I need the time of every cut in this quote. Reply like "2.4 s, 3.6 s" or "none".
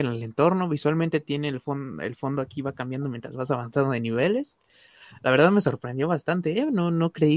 none